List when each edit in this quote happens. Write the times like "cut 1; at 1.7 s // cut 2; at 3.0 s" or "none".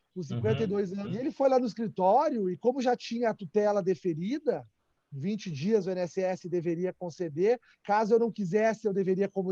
cut 1; at 1.0 s

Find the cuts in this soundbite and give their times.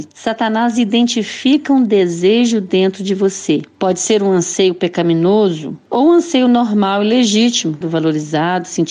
cut 1; at 7.8 s

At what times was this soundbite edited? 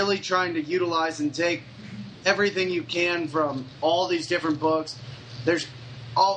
none

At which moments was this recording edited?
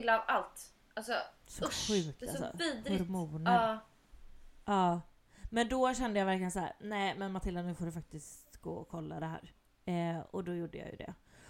none

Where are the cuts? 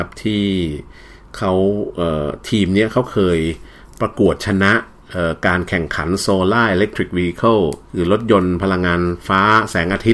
cut 1; at 7.8 s // cut 2; at 9.2 s

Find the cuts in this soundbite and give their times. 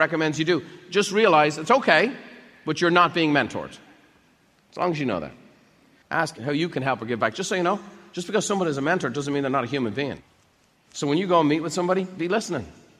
cut 1; at 6.0 s

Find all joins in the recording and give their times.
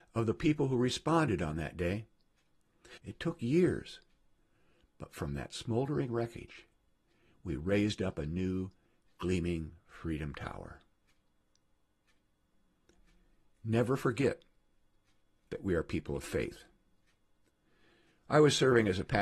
cut 1; at 3.0 s

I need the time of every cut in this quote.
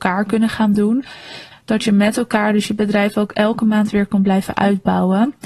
cut 1; at 1.5 s

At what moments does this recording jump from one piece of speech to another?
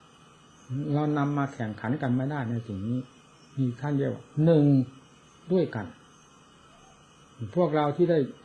none

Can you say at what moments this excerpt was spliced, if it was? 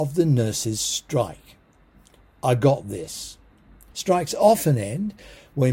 cut 1; at 3.9 s

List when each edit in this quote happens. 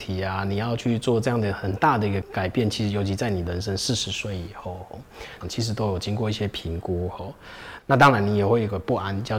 cut 1; at 2.2 s // cut 2; at 5.4 s // cut 3; at 7.8 s

